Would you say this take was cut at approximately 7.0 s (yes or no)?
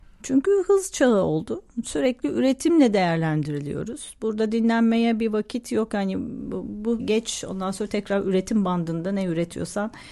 yes